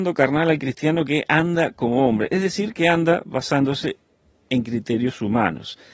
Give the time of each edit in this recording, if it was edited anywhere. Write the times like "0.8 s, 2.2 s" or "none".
none